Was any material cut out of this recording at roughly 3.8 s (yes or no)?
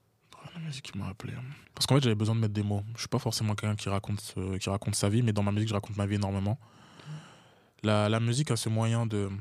no